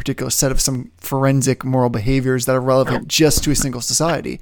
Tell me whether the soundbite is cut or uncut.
uncut